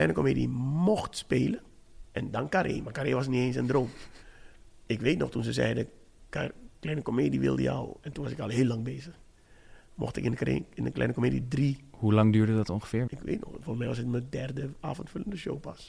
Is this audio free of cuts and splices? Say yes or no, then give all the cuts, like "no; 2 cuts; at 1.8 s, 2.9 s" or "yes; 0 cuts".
no; 2 cuts; at 2.0 s, 13.1 s